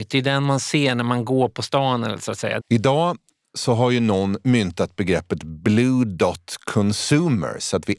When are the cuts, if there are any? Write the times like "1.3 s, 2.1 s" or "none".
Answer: 2.6 s

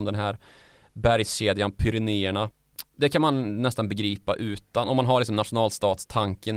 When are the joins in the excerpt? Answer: none

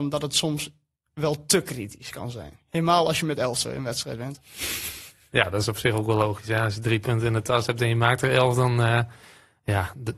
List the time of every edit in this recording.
none

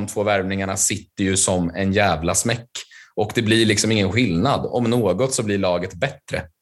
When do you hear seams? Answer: none

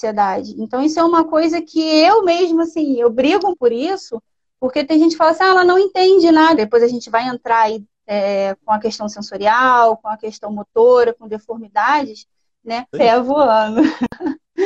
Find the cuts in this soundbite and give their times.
3.5 s, 6.6 s, 12.9 s

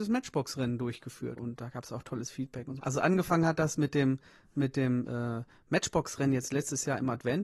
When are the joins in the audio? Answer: 1.4 s, 2.8 s

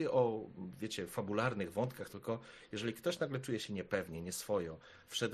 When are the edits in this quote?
2.1 s

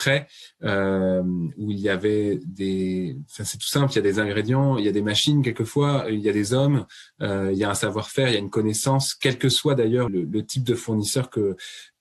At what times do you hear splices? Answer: 10.1 s

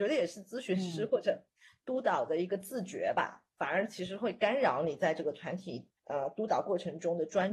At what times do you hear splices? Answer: 3.6 s, 6.0 s

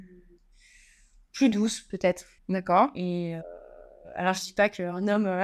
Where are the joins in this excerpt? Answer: 2.4 s

